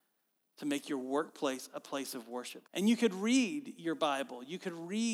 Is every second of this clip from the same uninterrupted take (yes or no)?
no